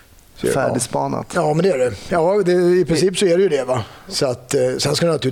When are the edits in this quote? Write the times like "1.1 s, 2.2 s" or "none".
none